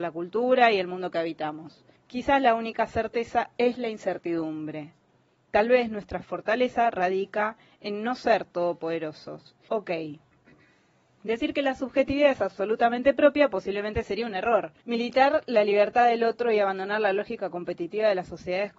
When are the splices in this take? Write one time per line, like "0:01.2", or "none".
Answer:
0:02.0
0:09.7
0:14.8